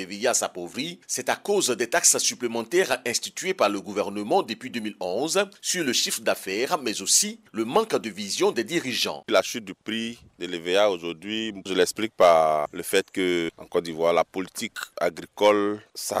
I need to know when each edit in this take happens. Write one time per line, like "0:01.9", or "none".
none